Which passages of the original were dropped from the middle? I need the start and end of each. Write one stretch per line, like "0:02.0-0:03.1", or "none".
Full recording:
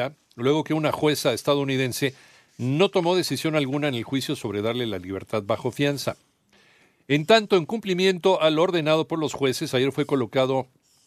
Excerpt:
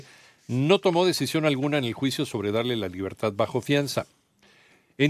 none